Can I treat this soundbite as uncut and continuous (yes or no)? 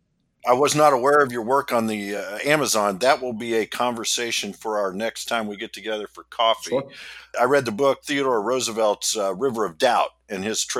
yes